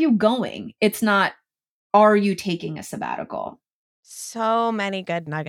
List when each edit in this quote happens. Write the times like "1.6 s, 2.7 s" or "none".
3.8 s